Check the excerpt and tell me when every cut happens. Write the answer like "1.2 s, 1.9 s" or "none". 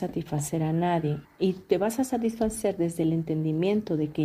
1.2 s